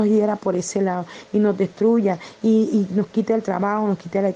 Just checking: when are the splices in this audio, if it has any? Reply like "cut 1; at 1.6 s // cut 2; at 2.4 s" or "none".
none